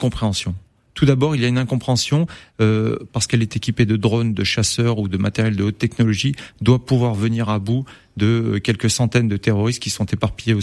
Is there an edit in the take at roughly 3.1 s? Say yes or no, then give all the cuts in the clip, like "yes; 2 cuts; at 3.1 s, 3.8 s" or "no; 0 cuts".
yes; 1 cut; at 3.1 s